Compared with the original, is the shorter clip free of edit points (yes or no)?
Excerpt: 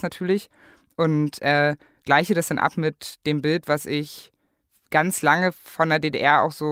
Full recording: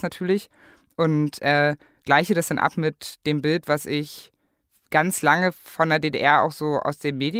yes